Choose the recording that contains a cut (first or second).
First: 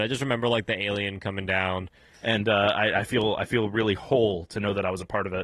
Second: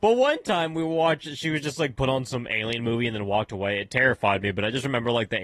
first